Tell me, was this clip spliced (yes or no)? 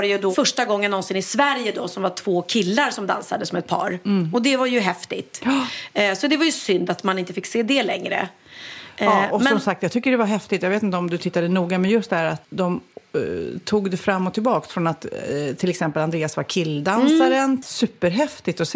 yes